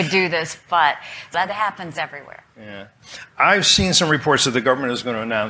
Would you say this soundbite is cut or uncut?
cut